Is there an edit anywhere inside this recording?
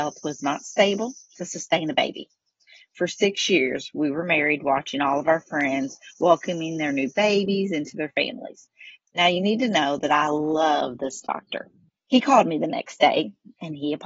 yes; 2 cuts; at 9.0 s, 11.9 s

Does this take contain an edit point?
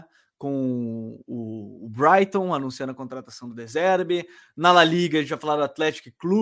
no; 0 cuts

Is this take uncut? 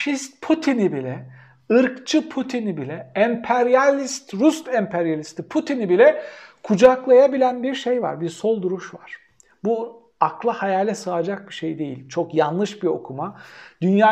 yes; 0 cuts

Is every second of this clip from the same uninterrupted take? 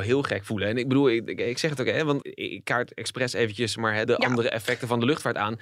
no; 2 cuts; at 2.2 s, 4.1 s

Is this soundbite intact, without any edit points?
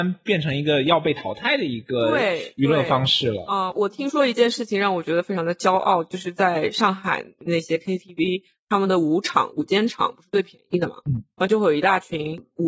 yes; 0 cuts

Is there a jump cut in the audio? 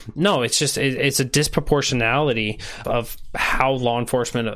yes; 1 cut; at 2.8 s

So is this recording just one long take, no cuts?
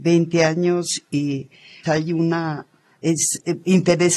no; 1 cut; at 1.9 s

